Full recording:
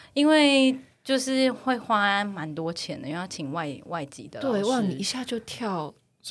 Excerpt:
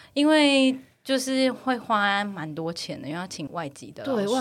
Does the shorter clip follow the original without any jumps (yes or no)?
no